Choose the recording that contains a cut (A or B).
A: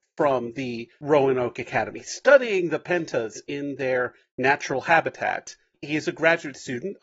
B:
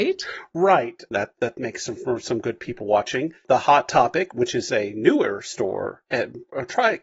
B